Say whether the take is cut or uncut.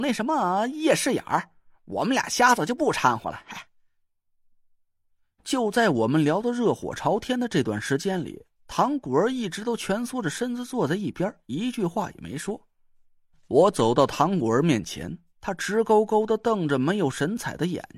uncut